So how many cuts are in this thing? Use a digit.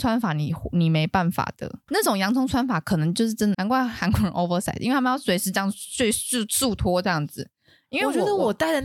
2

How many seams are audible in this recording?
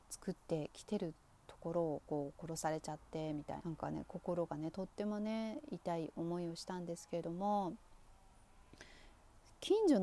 1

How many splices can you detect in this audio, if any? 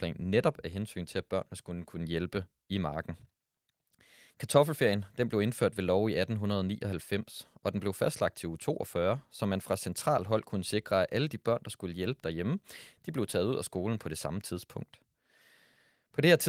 0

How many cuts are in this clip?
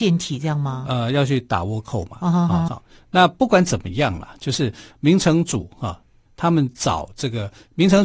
2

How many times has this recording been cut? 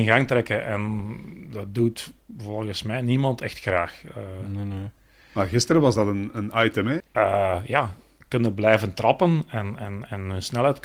1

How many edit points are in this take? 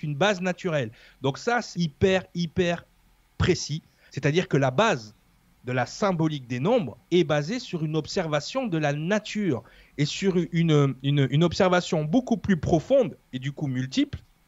3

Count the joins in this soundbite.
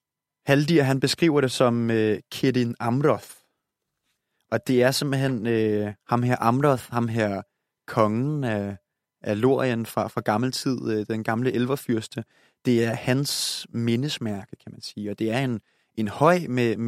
0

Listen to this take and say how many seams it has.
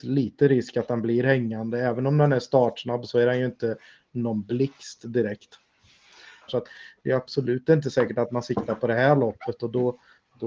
1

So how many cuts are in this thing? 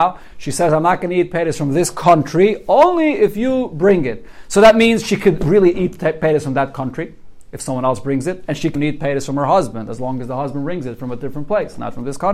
1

